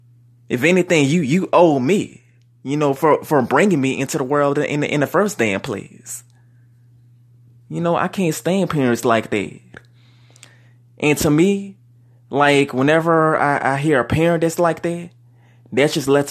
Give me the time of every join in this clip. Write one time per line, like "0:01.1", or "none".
none